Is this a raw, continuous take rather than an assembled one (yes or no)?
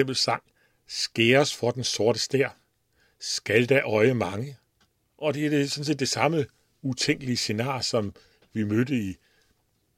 no